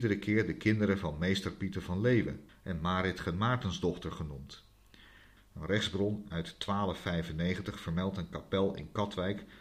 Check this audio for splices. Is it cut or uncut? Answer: cut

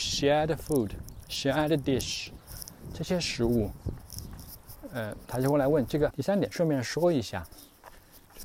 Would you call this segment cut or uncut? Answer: cut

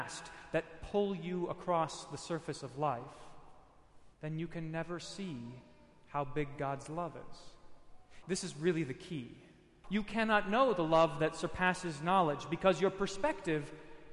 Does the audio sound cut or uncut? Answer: cut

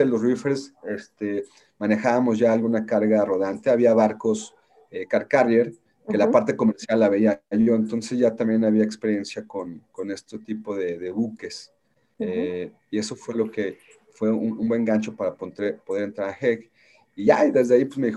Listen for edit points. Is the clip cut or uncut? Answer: uncut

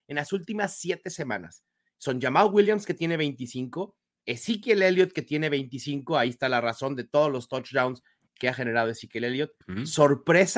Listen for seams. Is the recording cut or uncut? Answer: cut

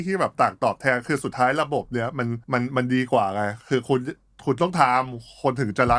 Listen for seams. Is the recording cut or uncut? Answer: cut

